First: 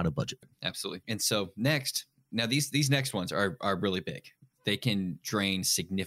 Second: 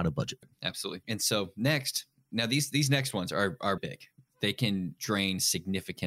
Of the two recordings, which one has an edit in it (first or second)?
second